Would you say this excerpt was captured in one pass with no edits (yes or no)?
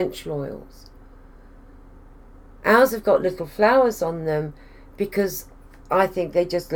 yes